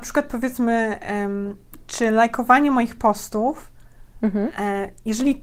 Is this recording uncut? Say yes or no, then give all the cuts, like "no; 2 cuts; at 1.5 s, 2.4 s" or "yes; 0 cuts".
yes; 0 cuts